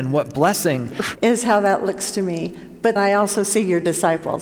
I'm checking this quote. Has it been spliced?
yes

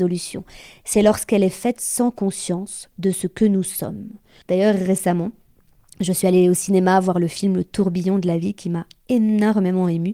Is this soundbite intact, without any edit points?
no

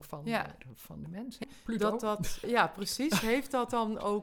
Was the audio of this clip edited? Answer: yes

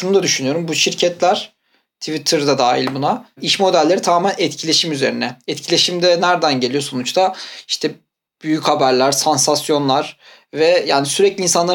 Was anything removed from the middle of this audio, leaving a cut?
no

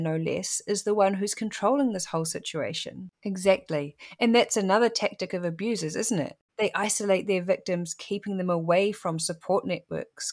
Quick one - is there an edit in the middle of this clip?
yes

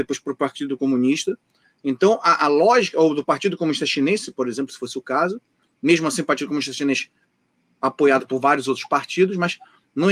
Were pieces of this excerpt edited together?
no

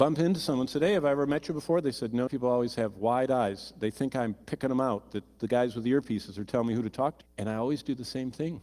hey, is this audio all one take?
no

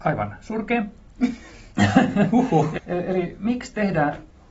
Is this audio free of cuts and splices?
no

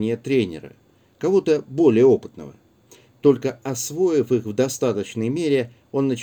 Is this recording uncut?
yes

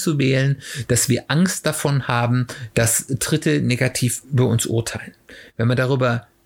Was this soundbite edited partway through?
no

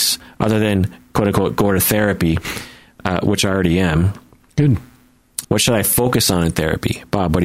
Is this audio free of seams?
no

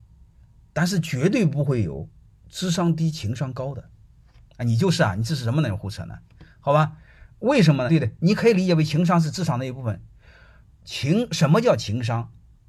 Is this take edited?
yes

